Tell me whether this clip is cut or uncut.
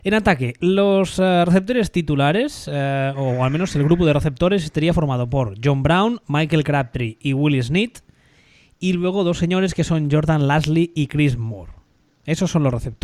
uncut